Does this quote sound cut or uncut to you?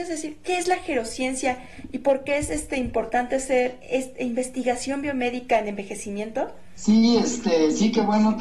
uncut